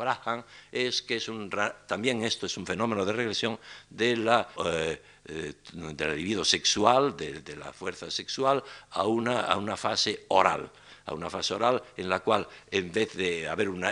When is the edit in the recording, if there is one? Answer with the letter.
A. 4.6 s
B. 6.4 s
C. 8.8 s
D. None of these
A